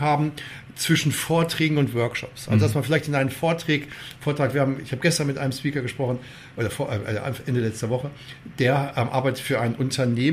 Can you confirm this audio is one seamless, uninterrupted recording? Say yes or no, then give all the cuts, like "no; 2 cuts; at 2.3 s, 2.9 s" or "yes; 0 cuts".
yes; 0 cuts